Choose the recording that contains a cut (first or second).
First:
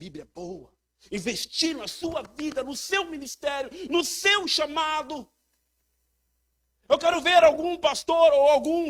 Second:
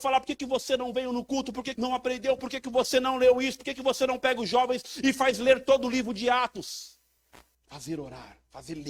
second